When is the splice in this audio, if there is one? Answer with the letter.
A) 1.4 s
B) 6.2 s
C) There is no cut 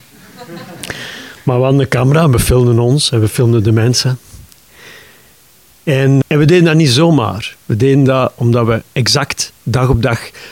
B